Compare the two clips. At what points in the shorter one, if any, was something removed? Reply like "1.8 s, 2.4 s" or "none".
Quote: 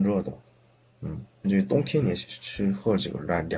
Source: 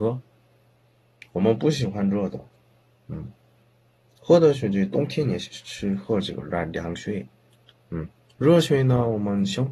1.4 s